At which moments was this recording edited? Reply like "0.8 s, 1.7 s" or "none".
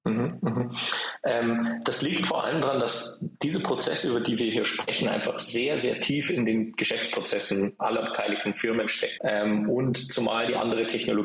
9.2 s

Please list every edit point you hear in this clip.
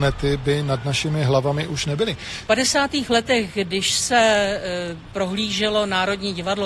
2.5 s

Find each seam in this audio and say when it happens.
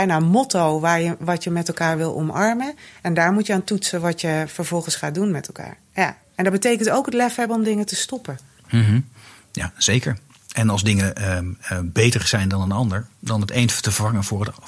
none

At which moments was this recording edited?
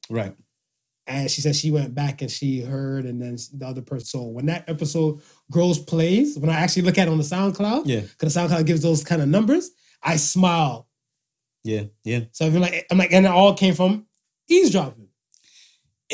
4.0 s

